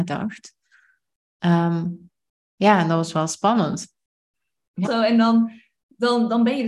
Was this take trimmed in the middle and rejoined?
yes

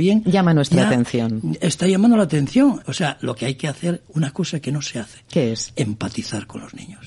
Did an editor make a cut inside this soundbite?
yes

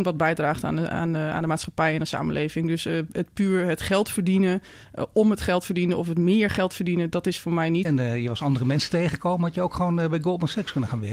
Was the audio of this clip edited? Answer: yes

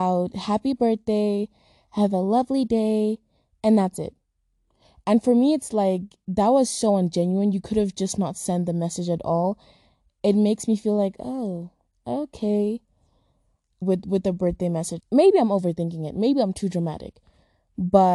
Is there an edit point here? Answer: yes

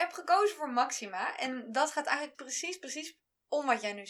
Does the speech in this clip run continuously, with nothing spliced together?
no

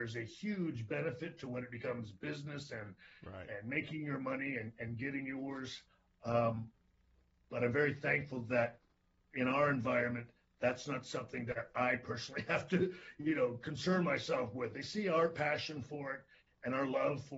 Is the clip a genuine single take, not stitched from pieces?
no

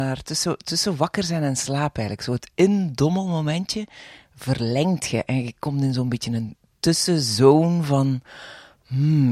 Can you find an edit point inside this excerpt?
no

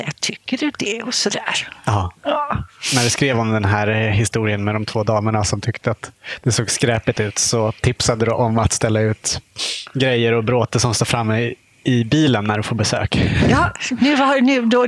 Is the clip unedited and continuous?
yes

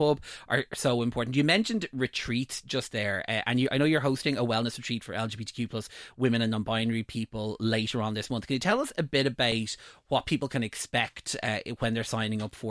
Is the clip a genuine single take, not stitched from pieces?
yes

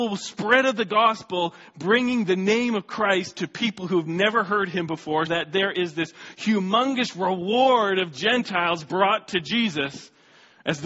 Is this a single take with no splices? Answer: no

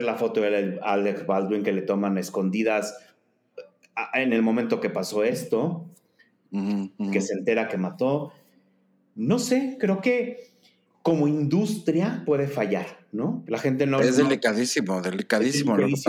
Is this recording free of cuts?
no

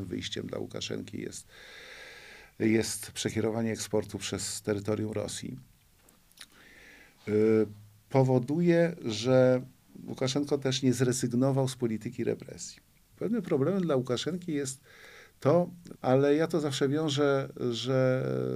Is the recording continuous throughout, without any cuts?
no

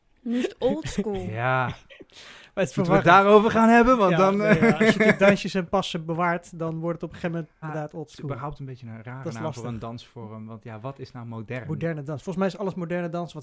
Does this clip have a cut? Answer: yes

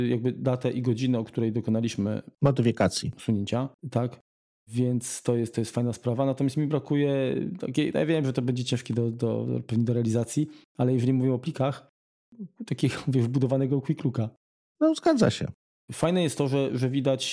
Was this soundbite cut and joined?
yes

